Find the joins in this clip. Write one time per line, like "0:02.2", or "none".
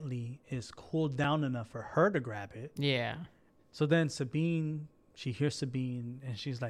0:03.6